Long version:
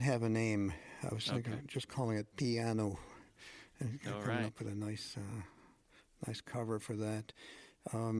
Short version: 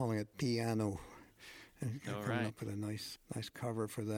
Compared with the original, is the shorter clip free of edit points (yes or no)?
no